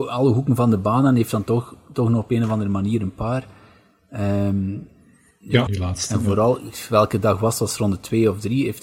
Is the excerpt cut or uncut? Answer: cut